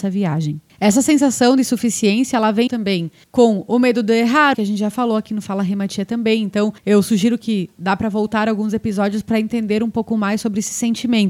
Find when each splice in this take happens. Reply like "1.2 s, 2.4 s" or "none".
2.7 s, 4.5 s